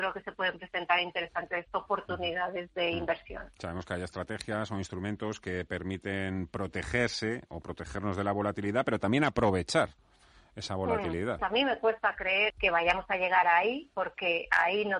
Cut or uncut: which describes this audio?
cut